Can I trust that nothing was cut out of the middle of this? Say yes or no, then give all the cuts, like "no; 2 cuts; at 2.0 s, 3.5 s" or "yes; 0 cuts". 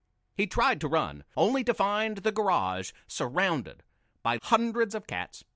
no; 1 cut; at 4.4 s